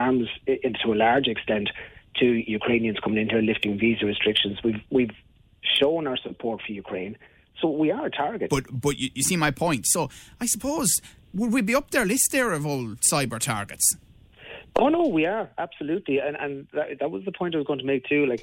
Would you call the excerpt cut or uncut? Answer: cut